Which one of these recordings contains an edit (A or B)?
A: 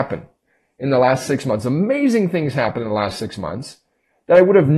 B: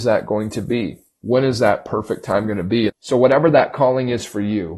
B